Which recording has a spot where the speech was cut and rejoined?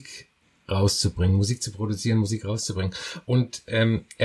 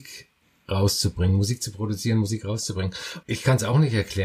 second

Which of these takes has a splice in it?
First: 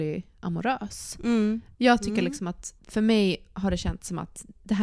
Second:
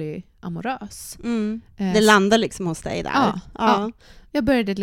first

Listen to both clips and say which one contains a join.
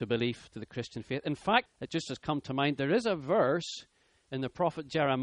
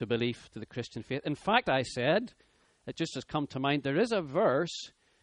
first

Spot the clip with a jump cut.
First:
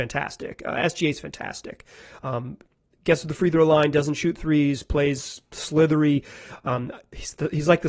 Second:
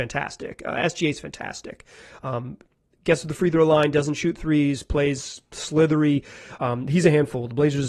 second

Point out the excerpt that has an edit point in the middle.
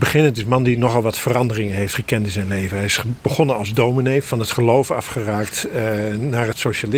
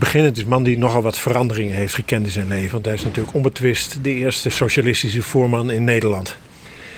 second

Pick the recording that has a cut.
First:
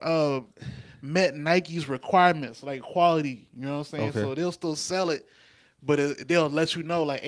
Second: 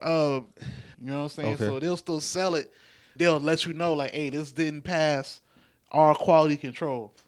second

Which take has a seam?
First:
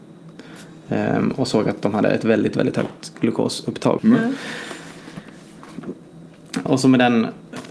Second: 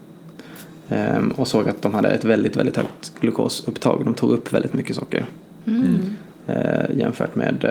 first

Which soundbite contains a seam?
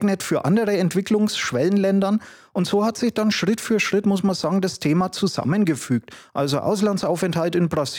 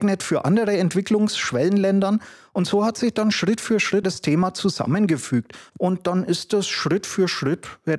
second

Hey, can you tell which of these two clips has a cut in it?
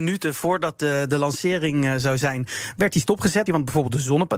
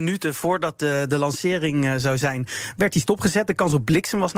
first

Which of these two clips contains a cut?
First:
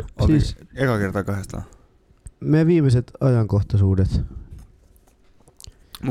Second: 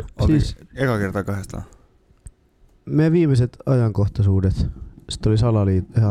first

